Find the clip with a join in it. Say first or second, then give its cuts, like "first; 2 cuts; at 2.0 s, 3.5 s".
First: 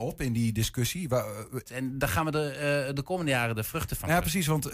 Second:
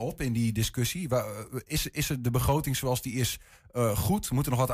first; 2 cuts; at 1.7 s, 2.9 s